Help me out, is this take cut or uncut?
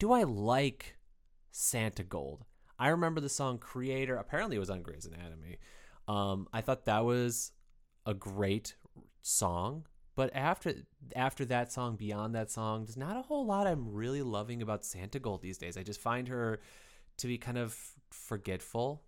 uncut